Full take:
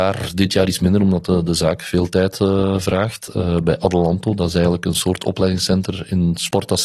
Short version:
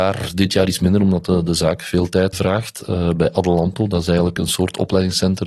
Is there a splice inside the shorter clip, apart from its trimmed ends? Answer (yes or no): yes